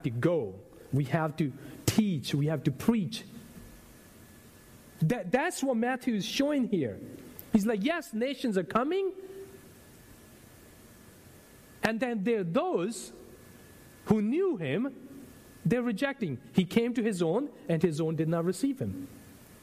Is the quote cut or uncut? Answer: uncut